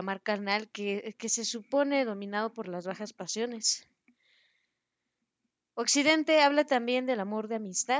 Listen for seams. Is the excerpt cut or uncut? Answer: uncut